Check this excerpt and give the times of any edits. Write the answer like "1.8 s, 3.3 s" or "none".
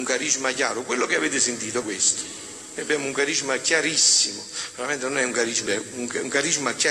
1.8 s, 5.7 s